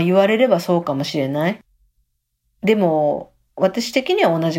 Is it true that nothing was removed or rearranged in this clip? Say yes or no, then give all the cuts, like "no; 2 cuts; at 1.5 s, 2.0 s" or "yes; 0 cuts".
yes; 0 cuts